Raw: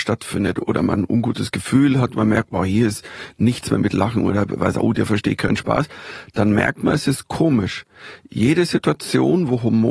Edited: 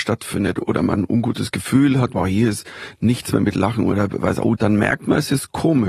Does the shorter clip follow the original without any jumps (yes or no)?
no